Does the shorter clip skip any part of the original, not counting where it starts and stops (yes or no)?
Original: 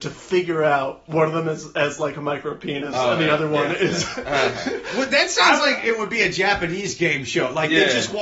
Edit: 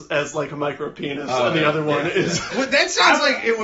yes